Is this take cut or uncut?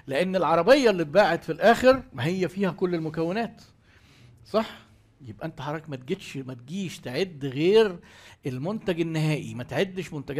uncut